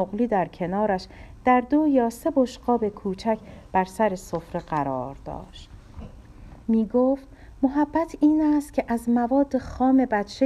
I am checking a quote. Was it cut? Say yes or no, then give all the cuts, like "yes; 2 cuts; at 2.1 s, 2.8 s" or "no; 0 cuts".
yes; 1 cut; at 6.6 s